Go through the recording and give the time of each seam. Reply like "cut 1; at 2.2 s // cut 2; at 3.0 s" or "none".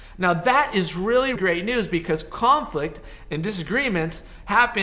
cut 1; at 1.3 s

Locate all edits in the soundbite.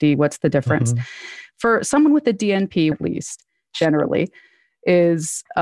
cut 1; at 2.9 s

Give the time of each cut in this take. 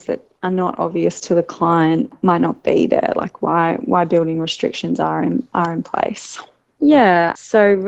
cut 1; at 6.8 s

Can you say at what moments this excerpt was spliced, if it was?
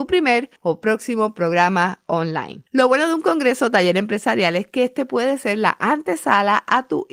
cut 1; at 2.7 s

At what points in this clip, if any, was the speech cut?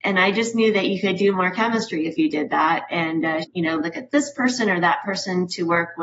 cut 1; at 3.4 s

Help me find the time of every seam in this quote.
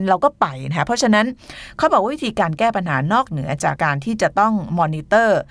cut 1; at 3.8 s

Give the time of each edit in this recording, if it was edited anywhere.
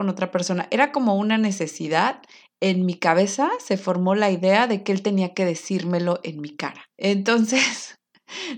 cut 1; at 6.9 s

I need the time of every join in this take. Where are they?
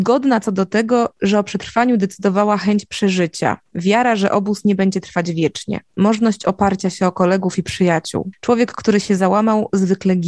none

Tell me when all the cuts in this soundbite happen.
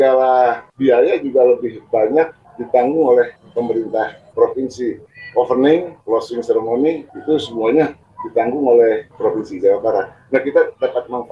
none

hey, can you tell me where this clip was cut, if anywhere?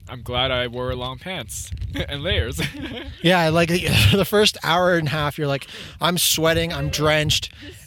none

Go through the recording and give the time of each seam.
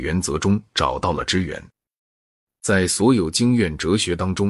none

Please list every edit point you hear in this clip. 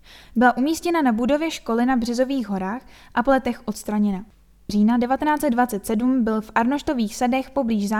cut 1; at 4.7 s

